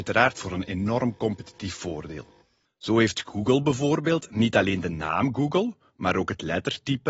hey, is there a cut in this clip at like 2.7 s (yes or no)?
yes